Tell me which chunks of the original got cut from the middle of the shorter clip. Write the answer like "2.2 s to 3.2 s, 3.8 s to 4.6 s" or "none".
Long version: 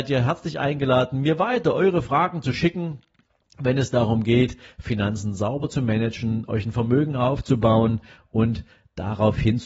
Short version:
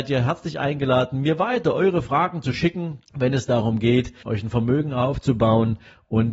3.1 s to 3.5 s, 4.7 s to 6.5 s